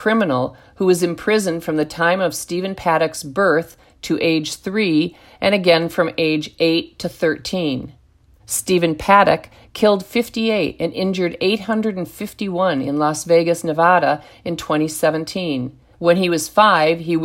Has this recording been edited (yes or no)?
yes